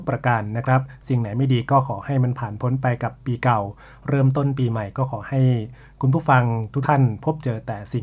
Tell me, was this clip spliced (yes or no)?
yes